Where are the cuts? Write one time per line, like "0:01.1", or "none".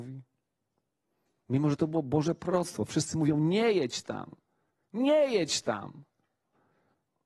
none